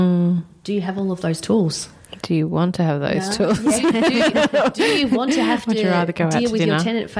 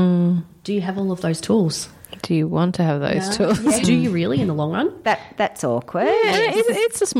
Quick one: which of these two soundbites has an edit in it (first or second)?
second